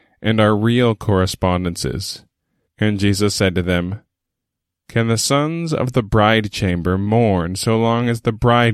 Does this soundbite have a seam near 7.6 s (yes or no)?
no